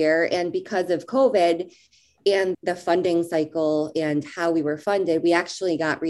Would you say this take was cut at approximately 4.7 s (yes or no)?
no